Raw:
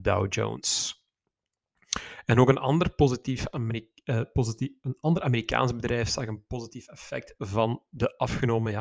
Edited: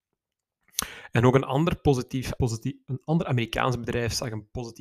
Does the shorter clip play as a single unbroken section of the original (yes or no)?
no